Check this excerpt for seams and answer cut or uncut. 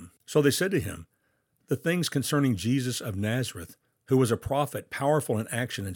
uncut